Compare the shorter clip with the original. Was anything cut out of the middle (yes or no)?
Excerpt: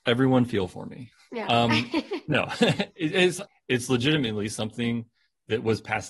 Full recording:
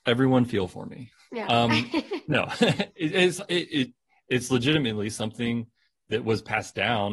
yes